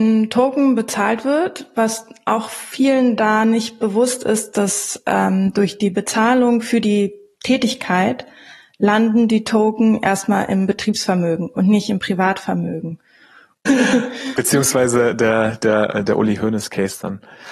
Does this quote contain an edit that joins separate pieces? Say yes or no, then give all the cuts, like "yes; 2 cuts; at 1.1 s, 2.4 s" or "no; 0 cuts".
yes; 1 cut; at 13.7 s